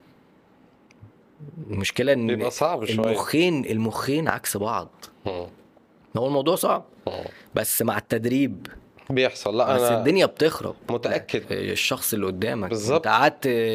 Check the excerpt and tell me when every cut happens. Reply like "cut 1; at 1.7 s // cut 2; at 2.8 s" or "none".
cut 1; at 11.4 s